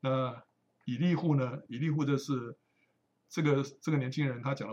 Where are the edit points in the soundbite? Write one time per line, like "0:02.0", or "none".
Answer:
none